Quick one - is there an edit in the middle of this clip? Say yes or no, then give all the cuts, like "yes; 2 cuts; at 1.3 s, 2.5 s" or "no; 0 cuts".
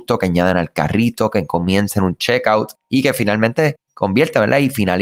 no; 0 cuts